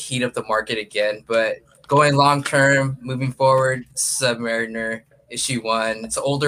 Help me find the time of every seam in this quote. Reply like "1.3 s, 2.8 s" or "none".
none